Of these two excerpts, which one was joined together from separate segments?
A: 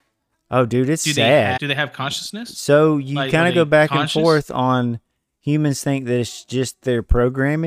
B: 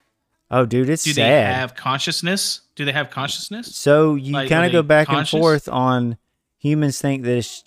A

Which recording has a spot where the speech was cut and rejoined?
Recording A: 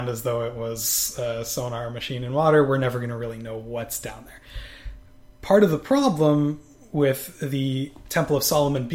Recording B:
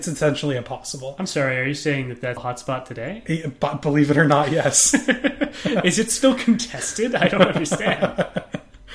B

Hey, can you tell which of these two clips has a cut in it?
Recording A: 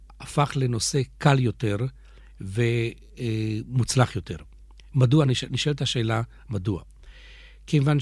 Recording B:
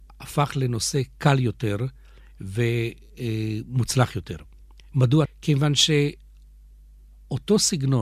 B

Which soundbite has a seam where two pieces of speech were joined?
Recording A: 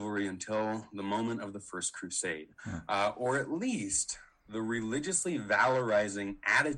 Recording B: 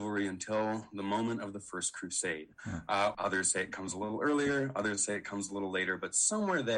B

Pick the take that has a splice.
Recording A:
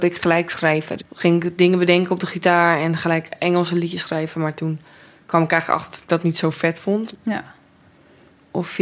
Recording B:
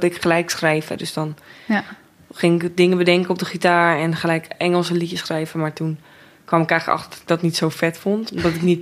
A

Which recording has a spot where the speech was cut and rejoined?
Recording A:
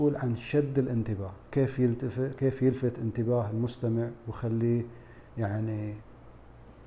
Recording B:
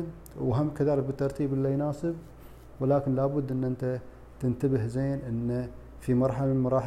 A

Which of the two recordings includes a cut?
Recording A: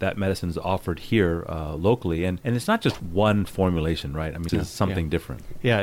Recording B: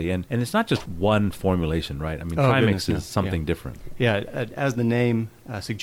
A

